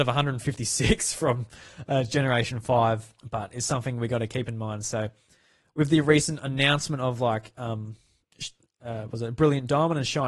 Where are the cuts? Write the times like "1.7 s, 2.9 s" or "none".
3.2 s